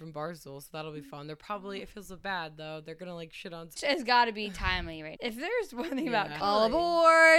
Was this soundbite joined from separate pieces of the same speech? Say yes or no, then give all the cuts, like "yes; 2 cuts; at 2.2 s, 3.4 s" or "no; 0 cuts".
yes; 3 cuts; at 3.8 s, 5.2 s, 6.4 s